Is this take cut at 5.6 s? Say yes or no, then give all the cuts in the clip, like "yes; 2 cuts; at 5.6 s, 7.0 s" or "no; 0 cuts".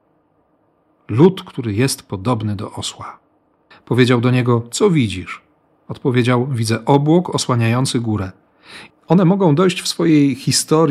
no; 2 cuts; at 3.7 s, 8.9 s